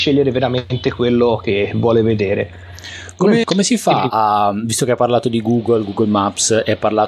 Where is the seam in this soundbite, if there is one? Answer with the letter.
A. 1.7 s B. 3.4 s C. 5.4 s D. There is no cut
B